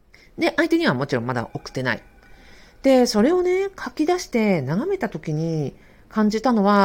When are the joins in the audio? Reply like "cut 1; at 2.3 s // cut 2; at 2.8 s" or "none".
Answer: none